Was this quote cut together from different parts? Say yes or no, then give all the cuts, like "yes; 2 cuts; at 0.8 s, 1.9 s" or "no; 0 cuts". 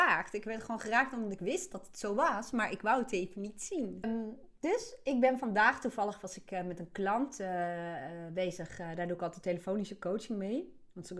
yes; 1 cut; at 4.0 s